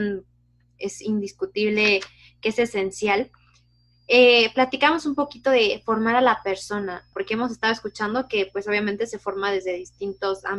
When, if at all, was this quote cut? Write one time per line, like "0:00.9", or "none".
0:07.1